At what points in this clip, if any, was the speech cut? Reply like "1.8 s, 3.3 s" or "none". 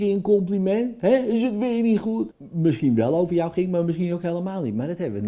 2.3 s